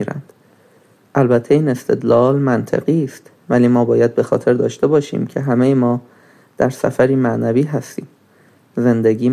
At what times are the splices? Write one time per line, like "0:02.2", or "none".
none